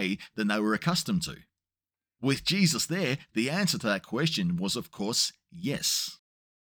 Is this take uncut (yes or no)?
yes